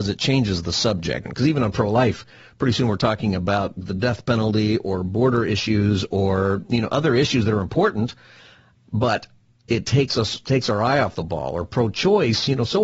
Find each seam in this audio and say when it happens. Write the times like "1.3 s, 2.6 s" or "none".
1.3 s